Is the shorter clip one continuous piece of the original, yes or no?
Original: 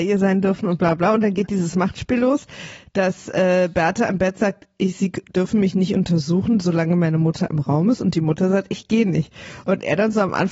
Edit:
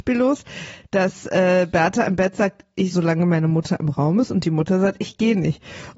no